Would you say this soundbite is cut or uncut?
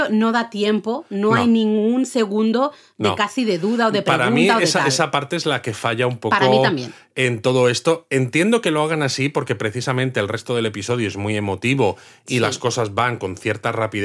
uncut